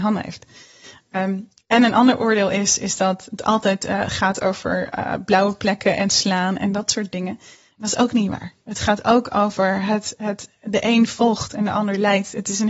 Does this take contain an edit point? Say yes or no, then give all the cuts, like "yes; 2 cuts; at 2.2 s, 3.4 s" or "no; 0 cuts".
no; 0 cuts